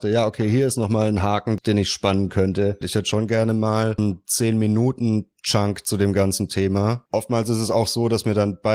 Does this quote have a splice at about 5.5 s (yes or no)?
no